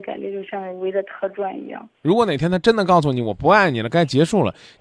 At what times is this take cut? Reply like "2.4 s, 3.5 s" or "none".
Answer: 1.9 s